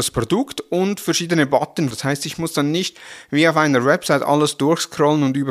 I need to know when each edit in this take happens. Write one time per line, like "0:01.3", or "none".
0:01.9